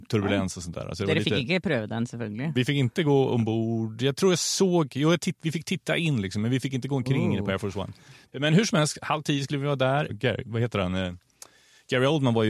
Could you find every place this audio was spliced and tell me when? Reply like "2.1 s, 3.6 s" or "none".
8.3 s, 10.1 s